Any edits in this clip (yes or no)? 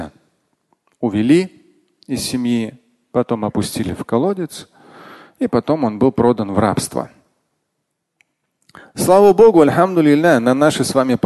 no